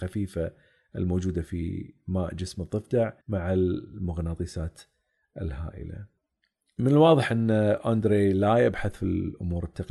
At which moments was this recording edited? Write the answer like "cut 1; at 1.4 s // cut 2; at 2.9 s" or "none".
cut 1; at 3.2 s

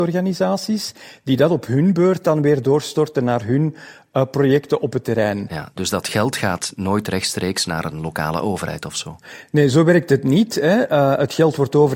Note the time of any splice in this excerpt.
none

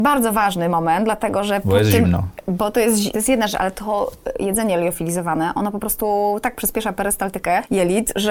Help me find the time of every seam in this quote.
cut 1; at 3.1 s

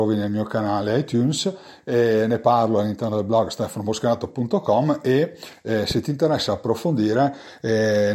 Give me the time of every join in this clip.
none

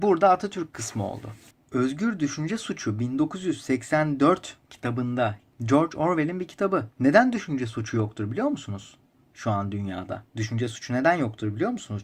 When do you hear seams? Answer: cut 1; at 6.9 s // cut 2; at 10.3 s

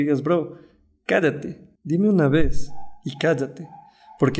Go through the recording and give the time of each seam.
cut 1; at 1.8 s

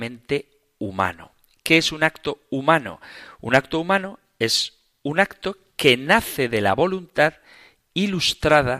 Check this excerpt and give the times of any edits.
none

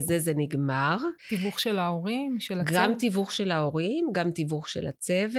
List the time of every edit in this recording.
cut 1; at 1.2 s

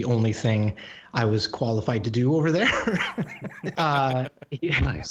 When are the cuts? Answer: cut 1; at 3.7 s

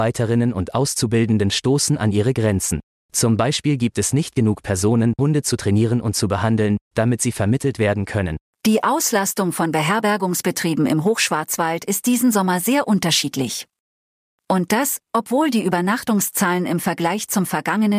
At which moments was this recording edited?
cut 1; at 5.2 s // cut 2; at 8.5 s

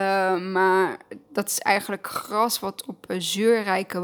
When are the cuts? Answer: none

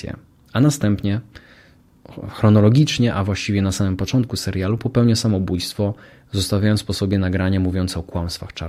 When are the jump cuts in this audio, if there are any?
none

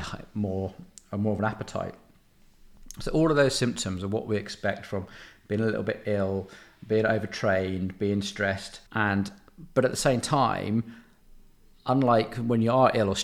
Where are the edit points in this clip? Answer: cut 1; at 8.9 s

